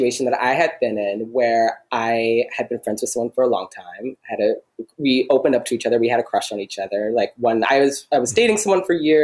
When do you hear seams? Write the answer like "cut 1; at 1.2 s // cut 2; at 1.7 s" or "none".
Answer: none